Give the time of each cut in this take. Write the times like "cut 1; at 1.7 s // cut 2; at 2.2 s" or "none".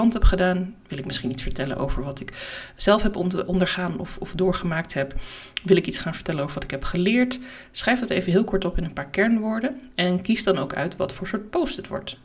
cut 1; at 3.5 s